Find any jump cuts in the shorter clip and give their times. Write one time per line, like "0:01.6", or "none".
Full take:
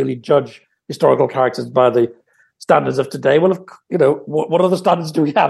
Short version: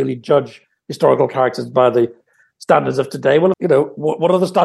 0:03.5